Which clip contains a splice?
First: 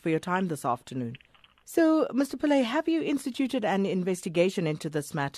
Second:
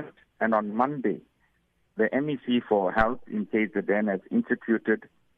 first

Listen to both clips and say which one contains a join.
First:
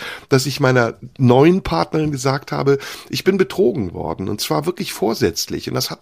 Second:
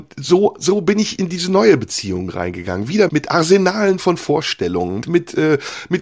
second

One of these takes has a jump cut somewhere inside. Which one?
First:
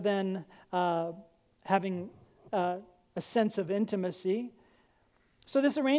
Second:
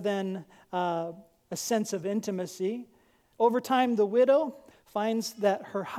second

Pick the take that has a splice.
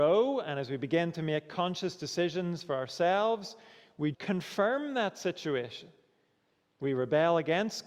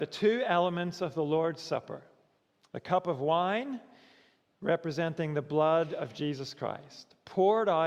first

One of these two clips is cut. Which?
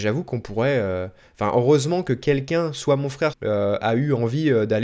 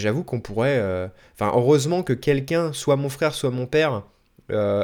first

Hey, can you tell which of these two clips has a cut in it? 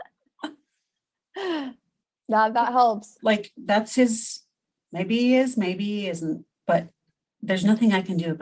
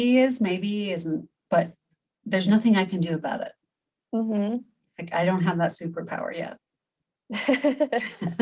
first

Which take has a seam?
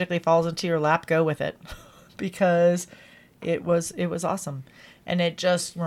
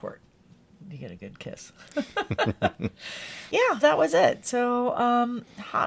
second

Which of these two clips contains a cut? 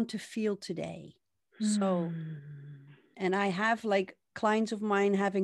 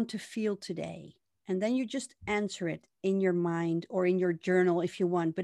first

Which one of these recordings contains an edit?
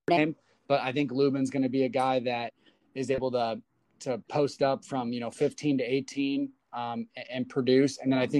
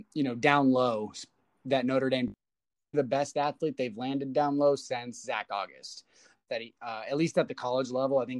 second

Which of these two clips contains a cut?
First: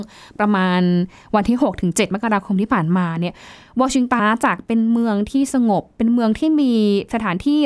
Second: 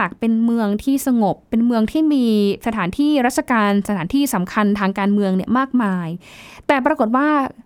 first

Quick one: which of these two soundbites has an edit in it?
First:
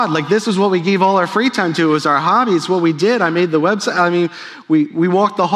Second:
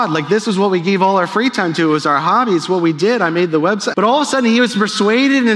second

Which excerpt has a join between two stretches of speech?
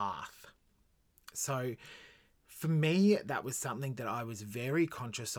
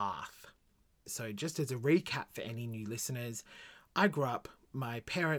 second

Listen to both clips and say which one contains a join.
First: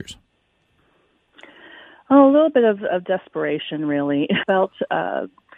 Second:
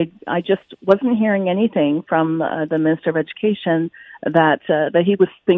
first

